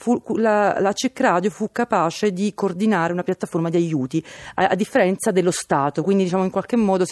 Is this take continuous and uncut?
yes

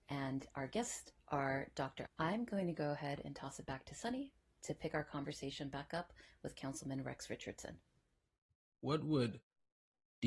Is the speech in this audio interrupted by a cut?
yes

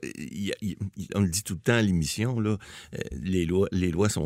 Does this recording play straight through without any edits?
no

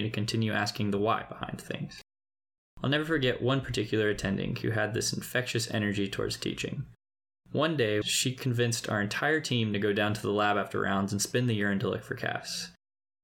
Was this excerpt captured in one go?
no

